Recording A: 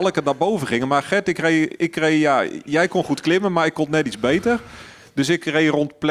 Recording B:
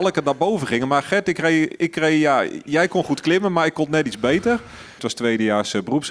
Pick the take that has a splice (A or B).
B